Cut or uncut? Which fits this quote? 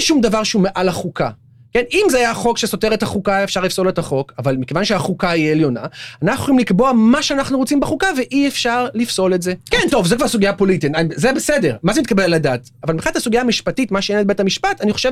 cut